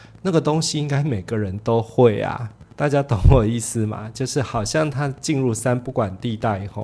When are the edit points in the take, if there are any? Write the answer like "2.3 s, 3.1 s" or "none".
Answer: 2.7 s